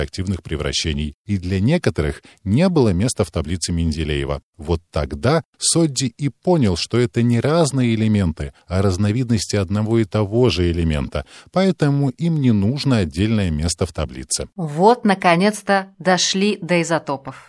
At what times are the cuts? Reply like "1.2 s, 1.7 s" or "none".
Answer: none